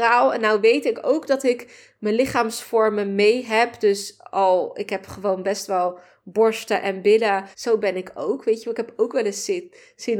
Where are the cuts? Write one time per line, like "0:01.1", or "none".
0:07.5